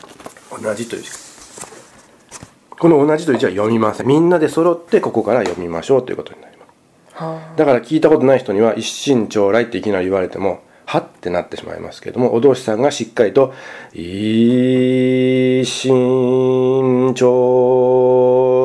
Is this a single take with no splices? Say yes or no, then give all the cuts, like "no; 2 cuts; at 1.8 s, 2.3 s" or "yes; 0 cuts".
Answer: no; 1 cut; at 4.0 s